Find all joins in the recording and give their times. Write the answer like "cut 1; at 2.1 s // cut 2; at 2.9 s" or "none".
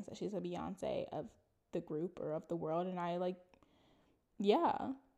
none